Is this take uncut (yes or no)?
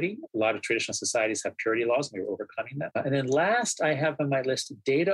yes